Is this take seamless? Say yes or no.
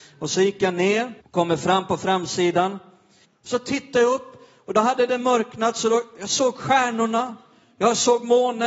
no